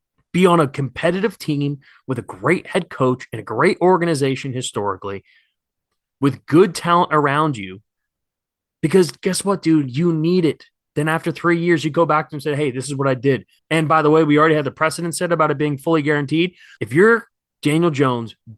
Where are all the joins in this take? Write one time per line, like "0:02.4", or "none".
0:10.9
0:13.6
0:16.8